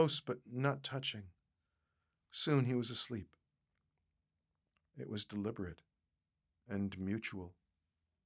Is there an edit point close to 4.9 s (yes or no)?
yes